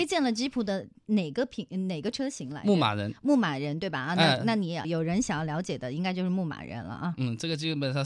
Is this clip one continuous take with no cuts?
no; 1 cut; at 4.8 s

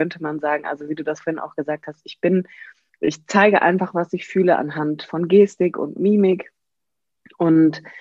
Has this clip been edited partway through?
no; 0 cuts

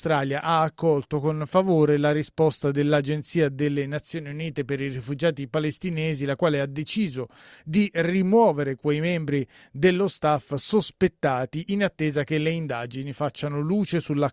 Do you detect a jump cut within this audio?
no; 0 cuts

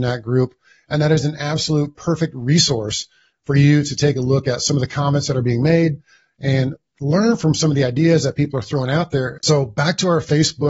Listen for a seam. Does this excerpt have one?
yes; 1 cut; at 9.4 s

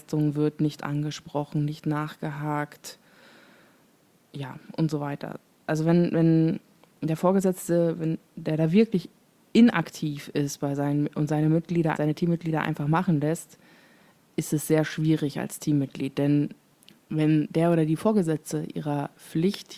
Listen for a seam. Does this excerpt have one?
yes; 1 cut; at 12.0 s

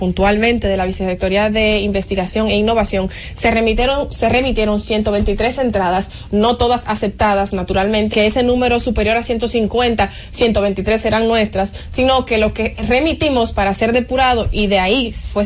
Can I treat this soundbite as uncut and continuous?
no; 1 cut; at 8.1 s

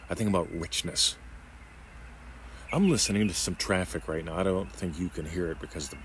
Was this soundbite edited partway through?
yes; 1 cut; at 2.7 s

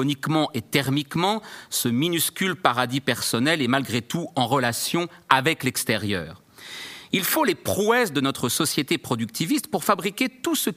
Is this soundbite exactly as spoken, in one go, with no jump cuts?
yes; 0 cuts

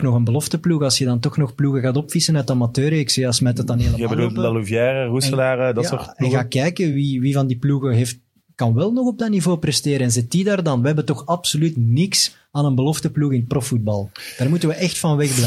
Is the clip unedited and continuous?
yes; 0 cuts

